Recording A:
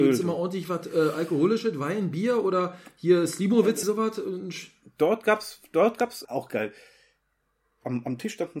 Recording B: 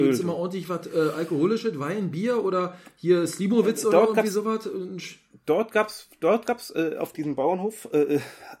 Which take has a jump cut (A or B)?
A